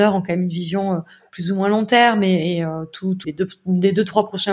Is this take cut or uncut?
cut